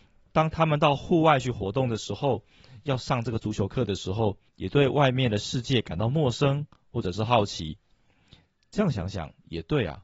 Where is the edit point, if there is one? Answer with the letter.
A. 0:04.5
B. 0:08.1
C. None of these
A